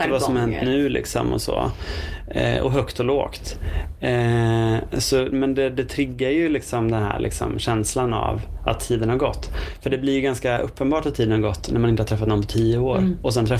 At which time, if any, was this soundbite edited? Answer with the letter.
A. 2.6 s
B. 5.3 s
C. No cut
B